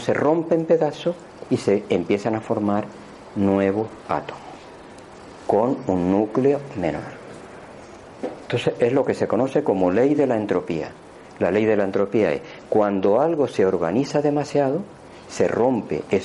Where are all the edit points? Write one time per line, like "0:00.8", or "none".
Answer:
none